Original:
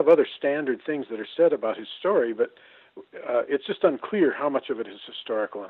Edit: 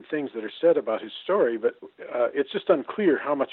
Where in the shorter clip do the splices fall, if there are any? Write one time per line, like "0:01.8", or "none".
0:01.8